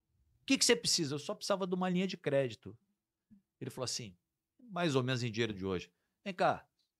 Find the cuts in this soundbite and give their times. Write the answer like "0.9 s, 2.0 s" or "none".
none